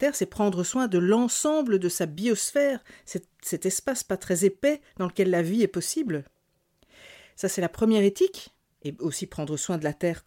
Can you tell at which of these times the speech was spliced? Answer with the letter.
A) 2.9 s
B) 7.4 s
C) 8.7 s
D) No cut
D